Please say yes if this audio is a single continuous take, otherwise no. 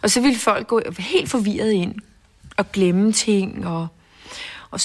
yes